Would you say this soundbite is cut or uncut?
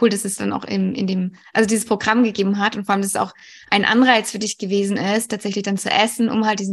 uncut